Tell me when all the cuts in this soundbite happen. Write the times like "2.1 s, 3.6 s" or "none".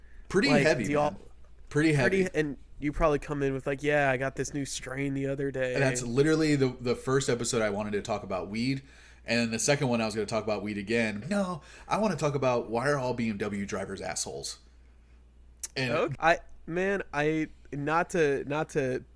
11.2 s, 16.1 s